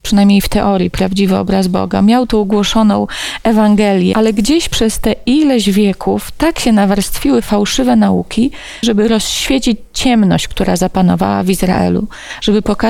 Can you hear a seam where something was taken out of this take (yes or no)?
yes